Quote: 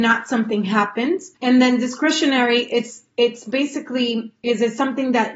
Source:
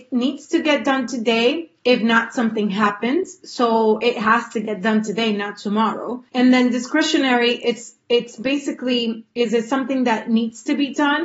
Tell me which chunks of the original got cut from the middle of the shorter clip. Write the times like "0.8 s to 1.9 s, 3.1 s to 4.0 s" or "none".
3.4 s to 6.3 s